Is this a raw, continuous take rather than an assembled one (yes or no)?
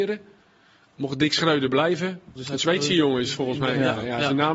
no